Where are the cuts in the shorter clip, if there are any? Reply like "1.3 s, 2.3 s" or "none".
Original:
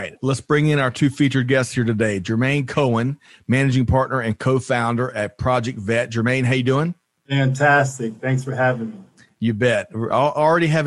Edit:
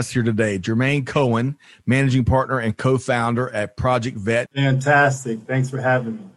4.5 s